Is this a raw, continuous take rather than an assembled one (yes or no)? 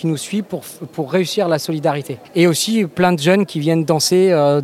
no